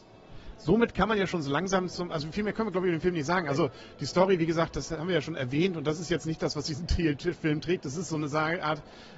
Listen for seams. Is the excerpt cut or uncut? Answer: uncut